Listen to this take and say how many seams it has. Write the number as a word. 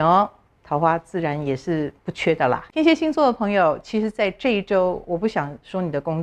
one